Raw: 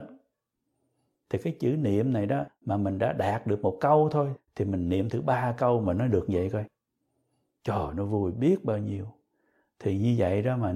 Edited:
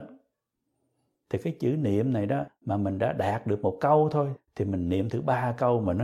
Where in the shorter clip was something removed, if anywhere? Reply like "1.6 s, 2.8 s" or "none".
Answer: none